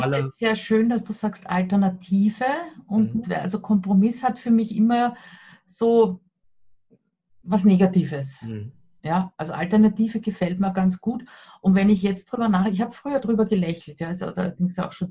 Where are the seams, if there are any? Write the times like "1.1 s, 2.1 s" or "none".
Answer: 3.2 s